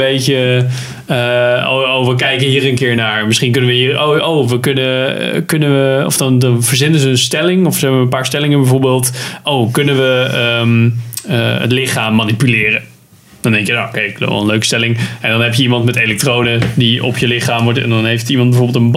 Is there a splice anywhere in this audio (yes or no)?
no